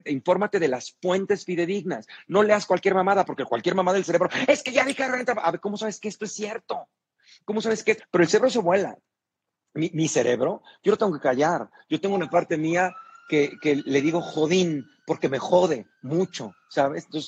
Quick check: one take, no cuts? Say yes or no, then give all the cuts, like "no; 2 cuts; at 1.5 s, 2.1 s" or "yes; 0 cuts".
no; 1 cut; at 8.0 s